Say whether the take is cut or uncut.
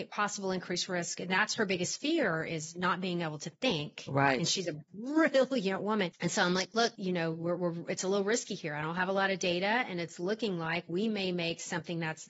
uncut